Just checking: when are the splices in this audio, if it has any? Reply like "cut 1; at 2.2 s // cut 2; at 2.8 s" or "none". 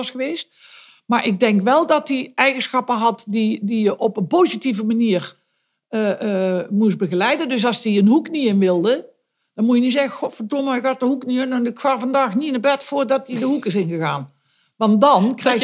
none